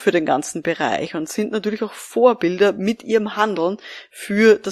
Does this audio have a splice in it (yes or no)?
no